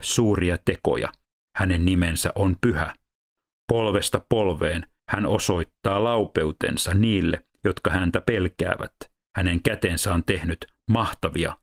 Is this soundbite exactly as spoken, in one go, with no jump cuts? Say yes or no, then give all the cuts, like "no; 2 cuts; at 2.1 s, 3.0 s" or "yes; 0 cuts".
yes; 0 cuts